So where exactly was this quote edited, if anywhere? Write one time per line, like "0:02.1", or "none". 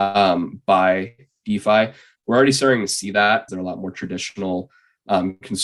0:03.5